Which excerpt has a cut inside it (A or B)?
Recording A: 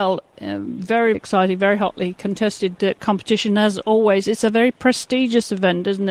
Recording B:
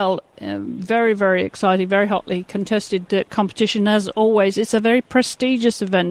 A